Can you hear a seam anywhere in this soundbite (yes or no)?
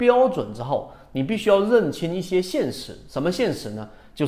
no